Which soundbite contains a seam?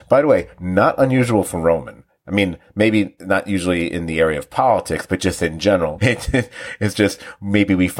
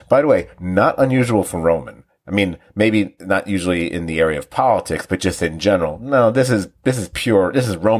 first; 1 cut; at 6.0 s

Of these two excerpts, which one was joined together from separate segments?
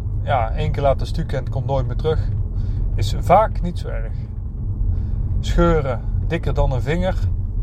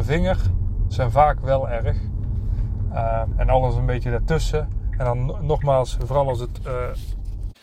second; 1 cut; at 3.3 s

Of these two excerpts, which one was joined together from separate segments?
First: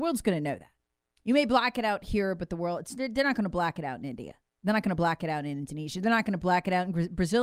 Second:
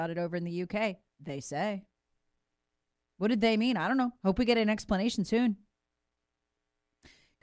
first; 1 cut; at 1.0 s

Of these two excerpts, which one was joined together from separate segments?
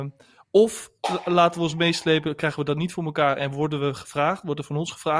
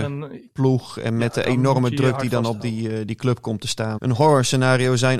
second; 1 cut; at 4.0 s

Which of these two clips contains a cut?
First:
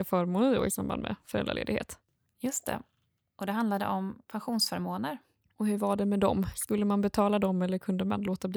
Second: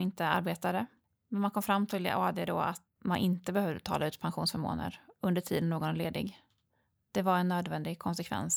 second; 1 cut; at 2.9 s

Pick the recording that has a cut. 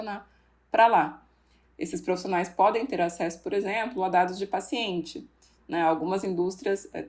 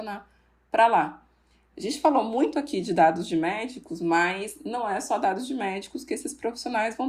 first; 1 cut; at 1.6 s

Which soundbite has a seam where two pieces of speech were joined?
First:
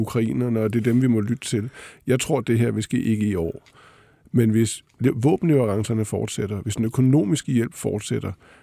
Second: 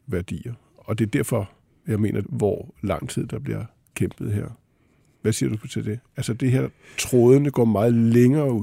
second; 1 cut; at 2.2 s

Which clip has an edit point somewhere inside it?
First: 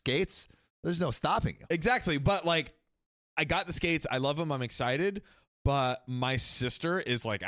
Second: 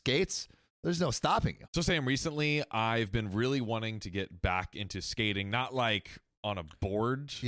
second; 1 cut; at 1.7 s

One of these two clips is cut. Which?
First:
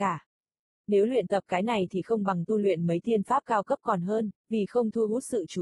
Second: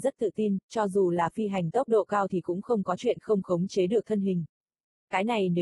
first; 1 cut; at 4.4 s

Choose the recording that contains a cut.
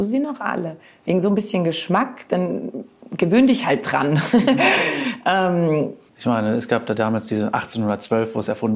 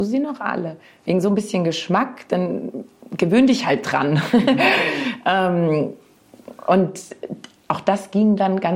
first; 1 cut; at 6.1 s

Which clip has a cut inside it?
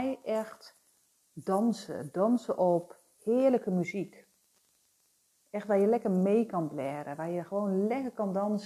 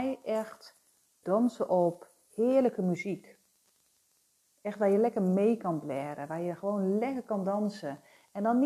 second; 1 cut; at 1.2 s

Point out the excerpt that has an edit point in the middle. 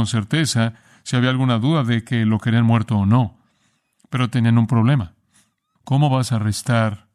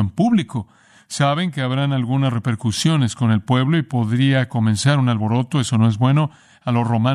first; 1 cut; at 5.8 s

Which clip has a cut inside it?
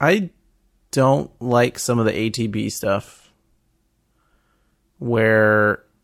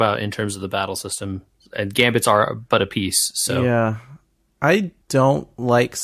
second; 1 cut; at 5.0 s

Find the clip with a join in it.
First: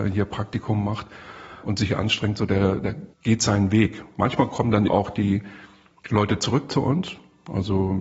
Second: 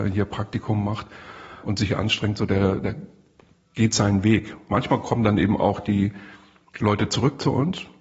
first; 2 cuts; at 3.1 s, 4.9 s

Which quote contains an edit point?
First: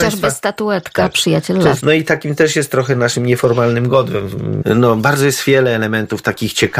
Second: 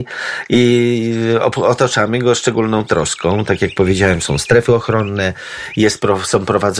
first; 2 cuts; at 1.8 s, 4.6 s

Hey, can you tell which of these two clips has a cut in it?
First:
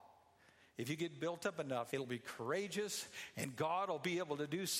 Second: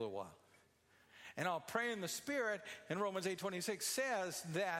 first; 1 cut; at 1.9 s

